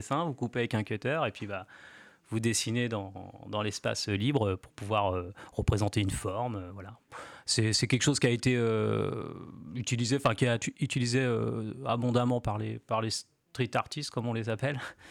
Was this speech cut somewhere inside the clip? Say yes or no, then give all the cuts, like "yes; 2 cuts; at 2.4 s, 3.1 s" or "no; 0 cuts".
no; 0 cuts